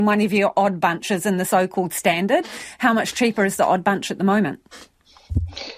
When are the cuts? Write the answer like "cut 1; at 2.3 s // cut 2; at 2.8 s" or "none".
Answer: none